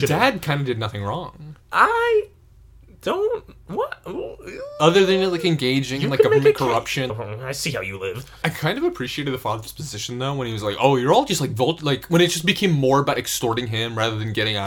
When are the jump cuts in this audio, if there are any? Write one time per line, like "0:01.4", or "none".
0:07.1